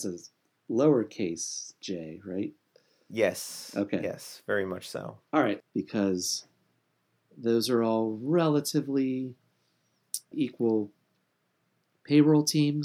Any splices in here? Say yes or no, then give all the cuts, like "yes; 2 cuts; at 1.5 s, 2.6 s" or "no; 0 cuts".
yes; 2 cuts; at 5.6 s, 10.3 s